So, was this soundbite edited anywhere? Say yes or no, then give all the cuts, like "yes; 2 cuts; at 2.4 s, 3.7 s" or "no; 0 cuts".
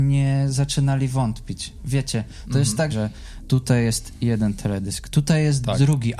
yes; 1 cut; at 2.9 s